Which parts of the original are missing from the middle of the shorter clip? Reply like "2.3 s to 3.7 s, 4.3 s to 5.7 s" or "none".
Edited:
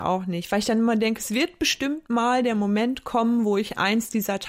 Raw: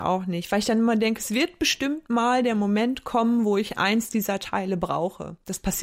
none